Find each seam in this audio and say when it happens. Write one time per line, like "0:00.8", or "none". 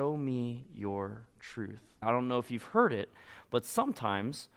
0:02.0